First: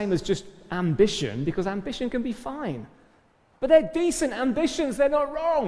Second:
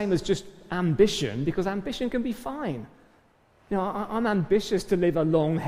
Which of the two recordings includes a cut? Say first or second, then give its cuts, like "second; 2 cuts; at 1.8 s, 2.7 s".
first; 1 cut; at 3.5 s